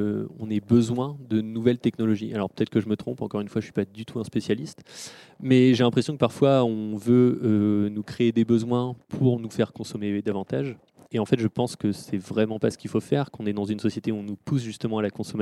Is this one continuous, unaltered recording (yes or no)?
yes